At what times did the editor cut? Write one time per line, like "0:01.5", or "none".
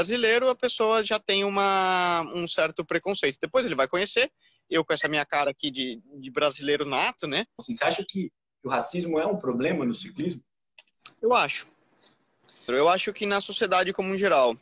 0:07.6
0:12.7